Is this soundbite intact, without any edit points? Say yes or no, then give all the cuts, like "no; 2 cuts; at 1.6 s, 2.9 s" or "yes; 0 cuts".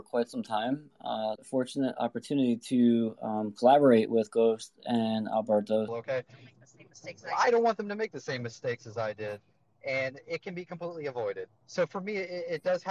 no; 3 cuts; at 1.4 s, 5.9 s, 11.5 s